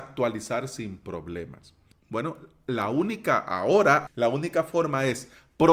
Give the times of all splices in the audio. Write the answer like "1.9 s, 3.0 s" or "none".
1.9 s, 4.1 s